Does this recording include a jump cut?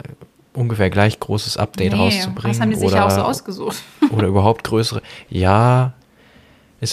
no; 0 cuts

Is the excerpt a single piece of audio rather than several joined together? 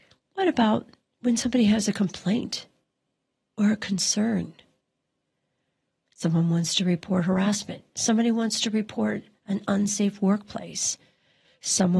yes; 0 cuts

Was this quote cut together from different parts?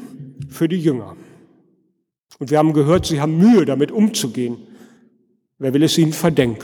no; 0 cuts

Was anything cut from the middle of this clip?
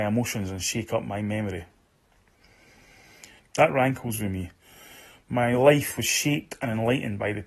yes; 1 cut; at 3.4 s

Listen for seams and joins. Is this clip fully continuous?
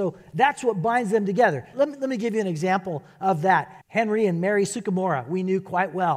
no; 2 cuts; at 1.7 s, 3.8 s

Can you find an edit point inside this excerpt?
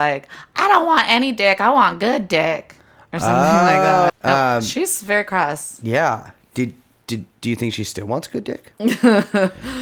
yes; 2 cuts; at 4.1 s, 7.4 s

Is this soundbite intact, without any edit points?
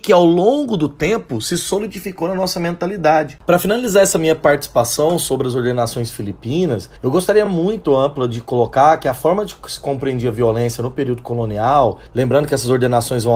yes; 0 cuts

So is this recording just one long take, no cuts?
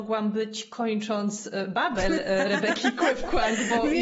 yes; 0 cuts

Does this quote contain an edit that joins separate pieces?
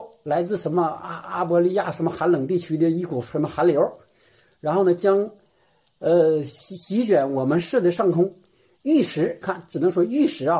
no; 0 cuts

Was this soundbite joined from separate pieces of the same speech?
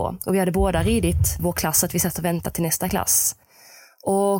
yes; 1 cut; at 1.4 s

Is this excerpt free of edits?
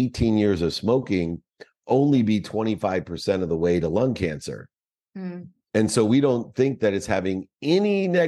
yes; 0 cuts

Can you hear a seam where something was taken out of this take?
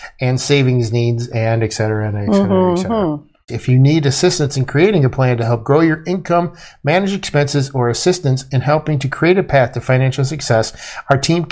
yes; 1 cut; at 3.5 s

